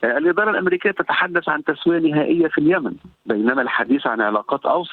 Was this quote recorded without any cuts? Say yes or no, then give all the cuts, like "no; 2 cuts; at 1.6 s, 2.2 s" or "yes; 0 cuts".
no; 1 cut; at 3.1 s